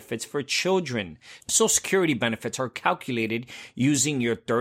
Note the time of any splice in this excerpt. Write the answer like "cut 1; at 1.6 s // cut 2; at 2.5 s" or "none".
cut 1; at 1.4 s